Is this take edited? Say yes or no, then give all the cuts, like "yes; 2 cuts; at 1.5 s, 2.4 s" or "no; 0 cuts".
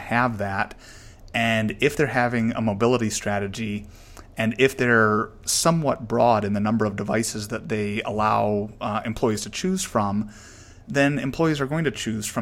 no; 0 cuts